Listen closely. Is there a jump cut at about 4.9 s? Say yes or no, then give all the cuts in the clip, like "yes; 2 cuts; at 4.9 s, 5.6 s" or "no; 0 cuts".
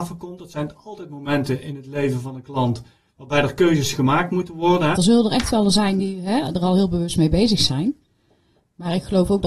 yes; 1 cut; at 4.9 s